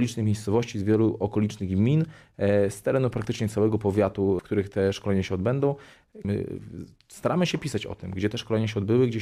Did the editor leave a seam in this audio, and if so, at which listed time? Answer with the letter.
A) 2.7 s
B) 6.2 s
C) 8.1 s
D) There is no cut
B